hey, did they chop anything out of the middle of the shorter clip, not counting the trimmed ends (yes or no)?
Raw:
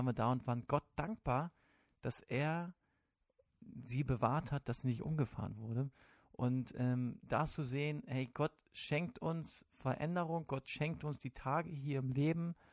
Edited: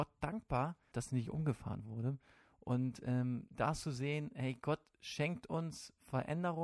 yes